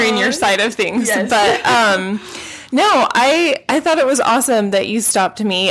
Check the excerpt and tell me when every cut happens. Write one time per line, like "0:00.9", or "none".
none